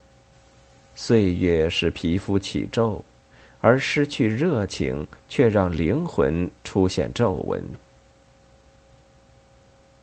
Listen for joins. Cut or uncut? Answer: uncut